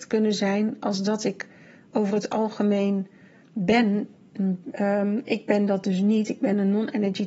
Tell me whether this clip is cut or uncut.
cut